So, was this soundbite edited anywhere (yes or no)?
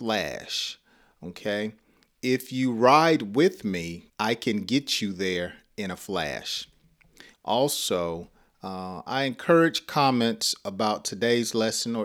yes